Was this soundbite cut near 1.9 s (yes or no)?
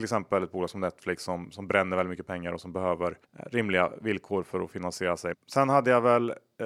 no